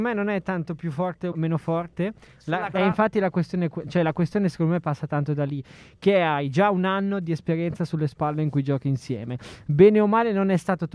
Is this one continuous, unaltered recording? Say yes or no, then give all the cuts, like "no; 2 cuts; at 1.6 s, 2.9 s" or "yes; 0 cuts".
no; 2 cuts; at 1.3 s, 2.7 s